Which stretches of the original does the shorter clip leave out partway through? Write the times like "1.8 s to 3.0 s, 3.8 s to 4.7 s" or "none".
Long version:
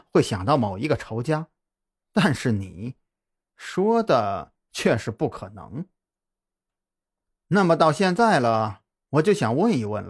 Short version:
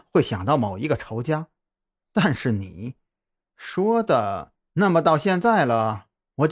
4.7 s to 7.4 s